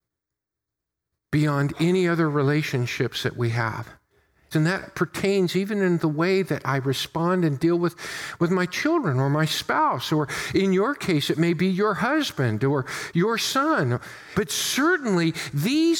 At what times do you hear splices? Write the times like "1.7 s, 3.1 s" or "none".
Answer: 4.5 s, 14.3 s